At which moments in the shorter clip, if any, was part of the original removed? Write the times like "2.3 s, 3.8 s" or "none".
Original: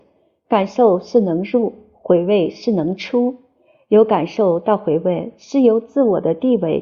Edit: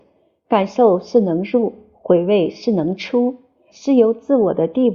3.7 s